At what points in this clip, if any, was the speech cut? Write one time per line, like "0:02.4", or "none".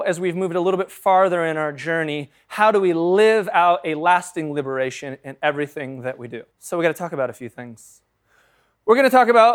0:06.5